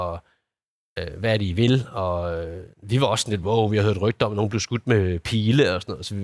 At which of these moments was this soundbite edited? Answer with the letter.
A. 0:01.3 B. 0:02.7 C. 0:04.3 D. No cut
D